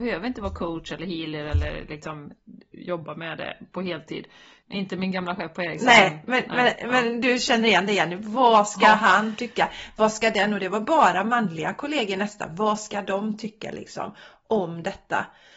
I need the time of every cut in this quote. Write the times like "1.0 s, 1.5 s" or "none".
4.6 s